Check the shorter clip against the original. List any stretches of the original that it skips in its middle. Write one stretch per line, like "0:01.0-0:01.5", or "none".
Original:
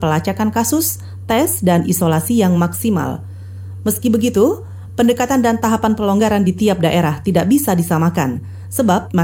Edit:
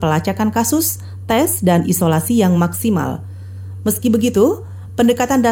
none